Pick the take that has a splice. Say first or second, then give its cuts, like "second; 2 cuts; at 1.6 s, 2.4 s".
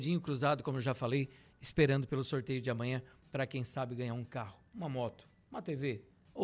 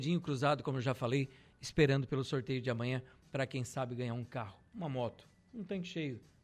first; 1 cut; at 5.4 s